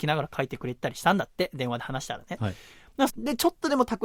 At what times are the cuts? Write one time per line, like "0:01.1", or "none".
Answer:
0:03.1

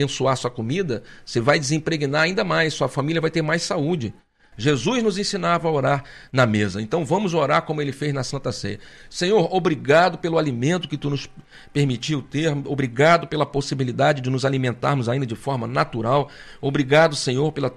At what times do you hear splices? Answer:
0:04.5

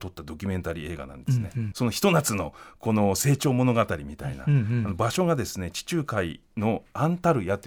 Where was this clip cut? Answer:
0:01.7

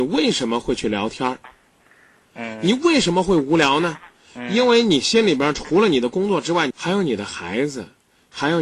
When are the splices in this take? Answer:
0:02.2
0:06.7

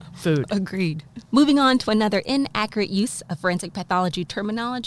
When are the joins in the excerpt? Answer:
0:01.2

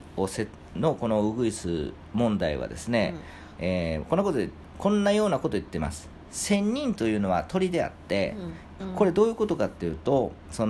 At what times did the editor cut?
0:03.6
0:08.8

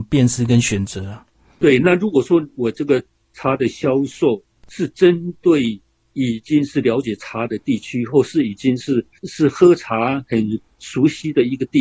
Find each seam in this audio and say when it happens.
none

